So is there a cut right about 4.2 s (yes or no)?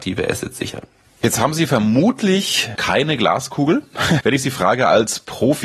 yes